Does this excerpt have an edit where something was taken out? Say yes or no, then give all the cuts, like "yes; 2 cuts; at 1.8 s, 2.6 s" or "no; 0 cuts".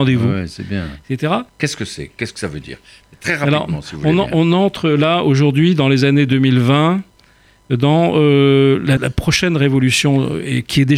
yes; 2 cuts; at 1.5 s, 9.0 s